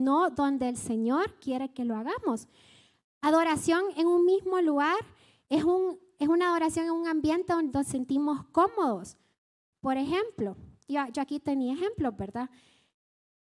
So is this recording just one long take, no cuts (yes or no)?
yes